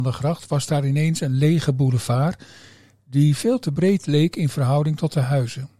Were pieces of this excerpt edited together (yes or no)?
no